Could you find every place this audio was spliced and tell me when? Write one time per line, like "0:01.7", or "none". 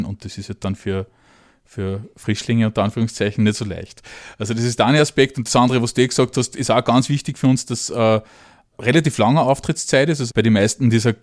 0:08.7
0:10.3